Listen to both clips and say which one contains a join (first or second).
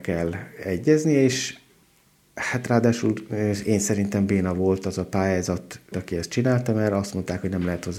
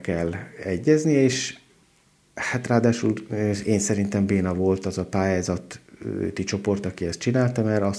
first